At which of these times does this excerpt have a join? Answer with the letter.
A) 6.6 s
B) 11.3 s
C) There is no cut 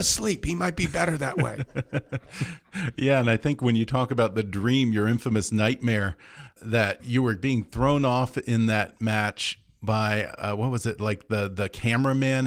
A